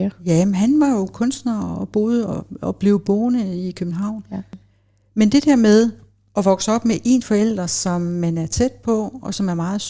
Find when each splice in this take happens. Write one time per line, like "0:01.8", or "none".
none